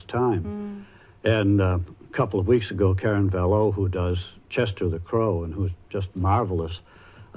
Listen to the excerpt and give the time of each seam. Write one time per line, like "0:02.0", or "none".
none